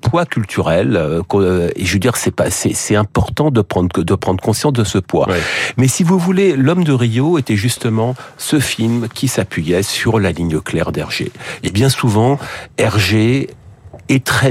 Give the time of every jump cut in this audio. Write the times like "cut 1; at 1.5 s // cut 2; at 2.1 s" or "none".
none